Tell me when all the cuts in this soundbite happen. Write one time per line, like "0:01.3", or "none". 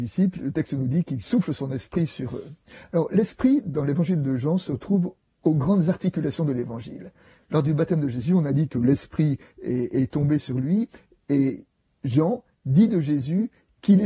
0:07.4